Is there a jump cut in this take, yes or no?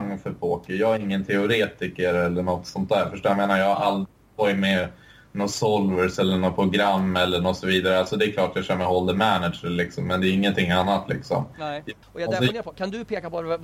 yes